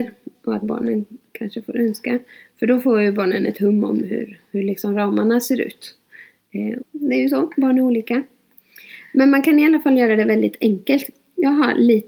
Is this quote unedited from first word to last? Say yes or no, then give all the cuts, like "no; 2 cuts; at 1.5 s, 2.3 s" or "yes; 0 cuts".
no; 1 cut; at 6.8 s